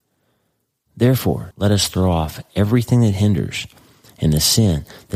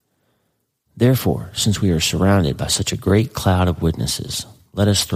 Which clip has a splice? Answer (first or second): first